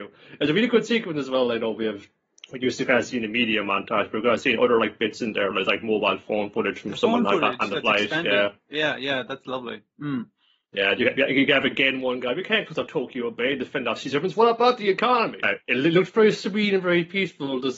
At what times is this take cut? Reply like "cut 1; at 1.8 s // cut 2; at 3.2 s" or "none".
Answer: cut 1; at 15.4 s